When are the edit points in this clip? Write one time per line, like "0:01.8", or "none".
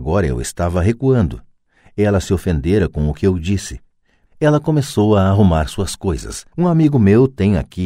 0:04.3
0:06.5

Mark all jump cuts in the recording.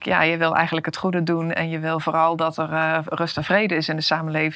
none

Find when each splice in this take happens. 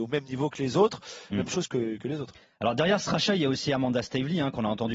0:01.3

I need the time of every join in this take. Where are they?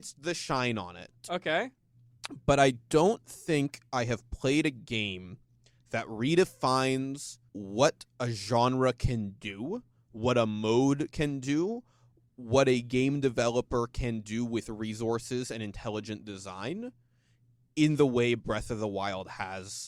0:07.5

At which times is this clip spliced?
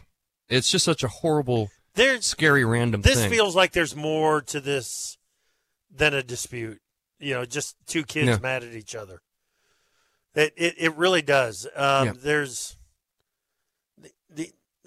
none

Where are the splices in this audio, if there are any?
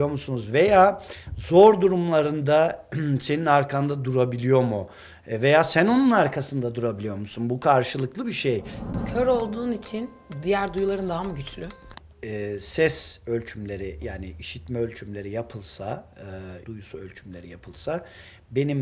0:16.6

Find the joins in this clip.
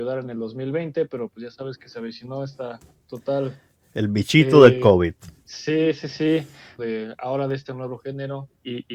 0:06.8

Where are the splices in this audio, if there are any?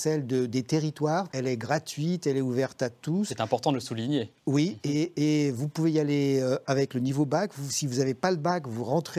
0:01.3

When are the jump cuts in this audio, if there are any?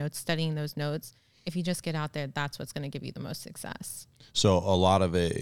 none

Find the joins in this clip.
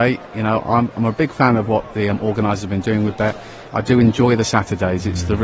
0:03.7

